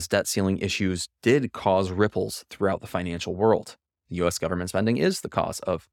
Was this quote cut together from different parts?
yes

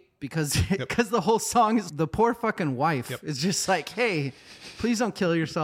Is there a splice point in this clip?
no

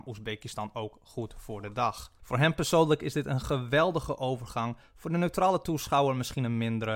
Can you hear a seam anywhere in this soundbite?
yes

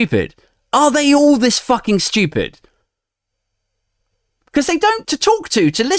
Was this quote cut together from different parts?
yes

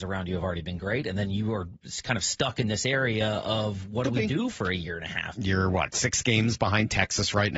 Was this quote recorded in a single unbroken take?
no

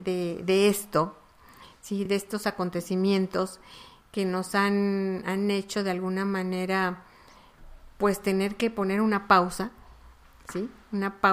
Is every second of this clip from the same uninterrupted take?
yes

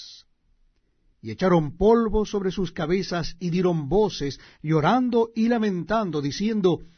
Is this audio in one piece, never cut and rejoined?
no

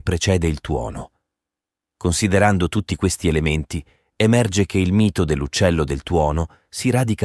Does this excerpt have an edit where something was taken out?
no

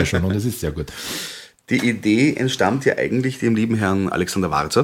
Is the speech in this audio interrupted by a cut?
no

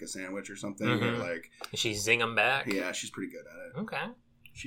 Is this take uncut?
yes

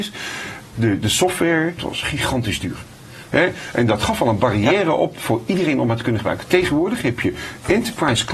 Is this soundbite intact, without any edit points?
no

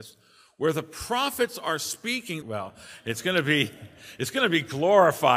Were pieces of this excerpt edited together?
yes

